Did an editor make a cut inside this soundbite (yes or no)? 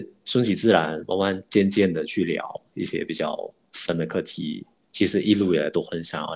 yes